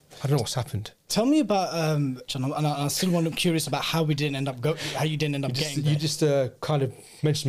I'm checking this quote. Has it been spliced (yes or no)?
yes